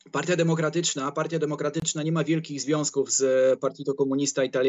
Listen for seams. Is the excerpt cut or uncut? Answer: uncut